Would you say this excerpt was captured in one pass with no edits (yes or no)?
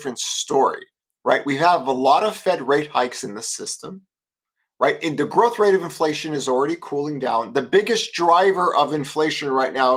yes